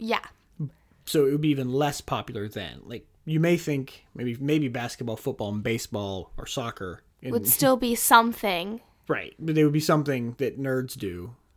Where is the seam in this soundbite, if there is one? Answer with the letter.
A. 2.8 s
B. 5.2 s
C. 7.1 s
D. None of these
C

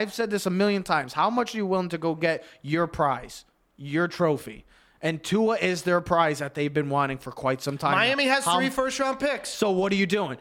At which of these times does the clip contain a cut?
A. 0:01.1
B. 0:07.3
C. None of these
C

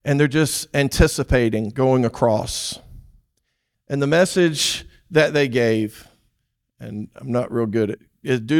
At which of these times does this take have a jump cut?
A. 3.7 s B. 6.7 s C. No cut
A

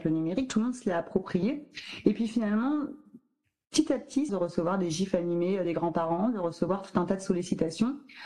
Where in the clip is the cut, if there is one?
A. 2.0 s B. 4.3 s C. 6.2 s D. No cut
B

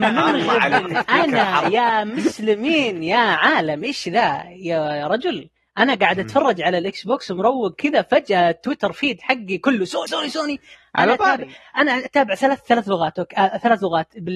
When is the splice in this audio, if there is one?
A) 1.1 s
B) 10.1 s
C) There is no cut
B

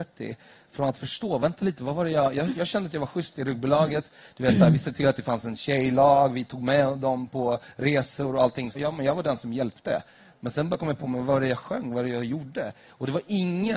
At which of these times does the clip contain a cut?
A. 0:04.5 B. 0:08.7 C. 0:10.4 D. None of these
B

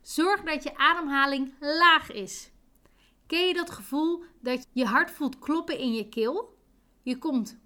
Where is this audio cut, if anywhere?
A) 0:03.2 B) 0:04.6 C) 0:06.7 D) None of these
B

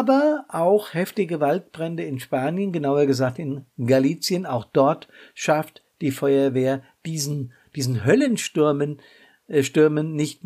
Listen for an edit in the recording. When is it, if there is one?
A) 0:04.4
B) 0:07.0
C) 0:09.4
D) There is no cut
D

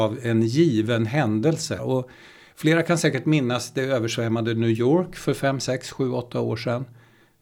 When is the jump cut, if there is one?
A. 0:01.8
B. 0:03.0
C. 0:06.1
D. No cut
A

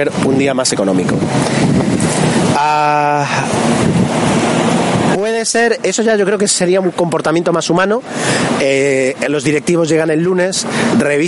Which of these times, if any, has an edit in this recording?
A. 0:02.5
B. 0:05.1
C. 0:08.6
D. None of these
B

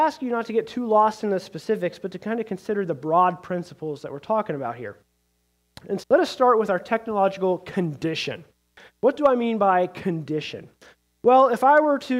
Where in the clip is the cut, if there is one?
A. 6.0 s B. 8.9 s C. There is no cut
A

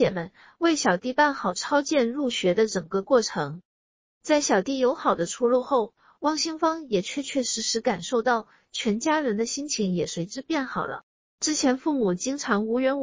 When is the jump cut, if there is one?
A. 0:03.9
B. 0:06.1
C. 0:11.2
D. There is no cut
D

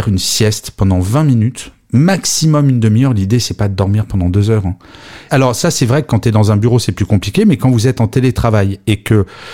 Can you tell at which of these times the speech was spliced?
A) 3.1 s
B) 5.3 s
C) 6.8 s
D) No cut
B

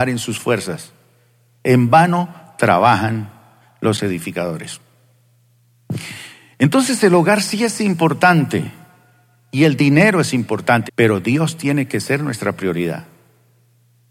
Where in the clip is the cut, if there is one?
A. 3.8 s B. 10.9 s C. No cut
B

